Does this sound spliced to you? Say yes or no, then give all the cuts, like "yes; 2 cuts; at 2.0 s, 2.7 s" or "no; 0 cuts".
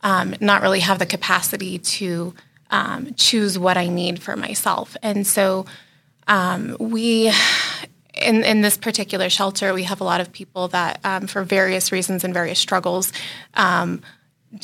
no; 0 cuts